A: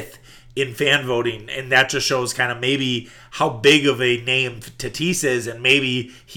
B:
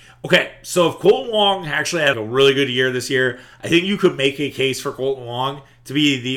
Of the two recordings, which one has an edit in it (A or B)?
B